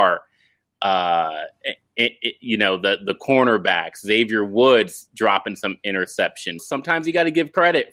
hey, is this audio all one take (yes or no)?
no